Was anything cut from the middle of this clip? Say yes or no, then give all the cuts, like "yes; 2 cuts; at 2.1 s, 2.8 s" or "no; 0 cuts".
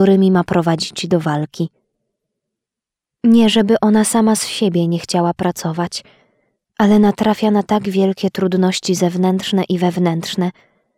yes; 1 cut; at 3.1 s